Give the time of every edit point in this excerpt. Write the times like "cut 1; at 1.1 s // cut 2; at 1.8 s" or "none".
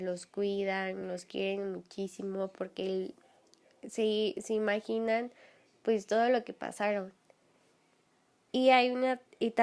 none